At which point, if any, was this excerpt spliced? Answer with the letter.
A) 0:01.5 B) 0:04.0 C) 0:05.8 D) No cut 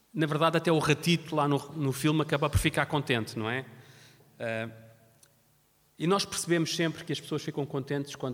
D